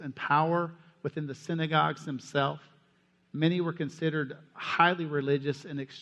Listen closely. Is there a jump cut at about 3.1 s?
no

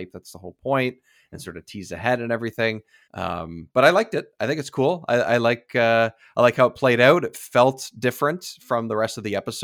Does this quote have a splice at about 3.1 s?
yes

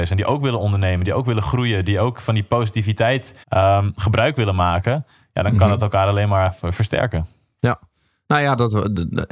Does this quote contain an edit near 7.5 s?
no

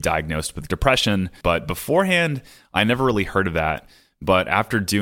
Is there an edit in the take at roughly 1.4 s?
yes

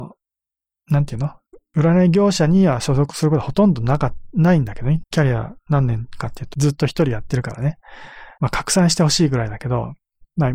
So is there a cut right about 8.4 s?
yes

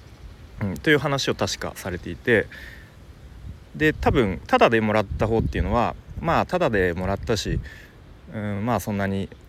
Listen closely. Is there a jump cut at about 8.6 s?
no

